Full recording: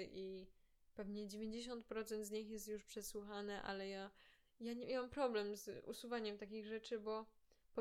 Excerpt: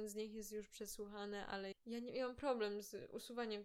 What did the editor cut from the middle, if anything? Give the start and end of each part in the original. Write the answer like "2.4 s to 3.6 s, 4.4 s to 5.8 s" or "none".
3.9 s to 4.5 s